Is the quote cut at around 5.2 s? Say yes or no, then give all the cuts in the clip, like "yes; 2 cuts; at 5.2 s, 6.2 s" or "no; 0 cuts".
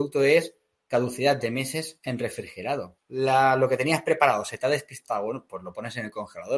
no; 1 cut; at 3.0 s